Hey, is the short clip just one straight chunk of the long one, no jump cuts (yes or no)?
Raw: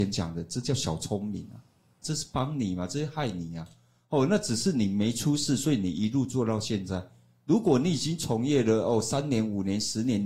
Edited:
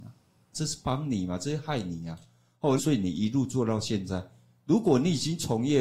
no